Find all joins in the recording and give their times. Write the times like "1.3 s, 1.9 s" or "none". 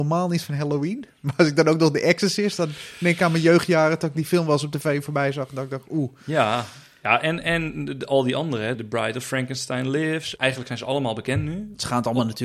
8.7 s, 10.4 s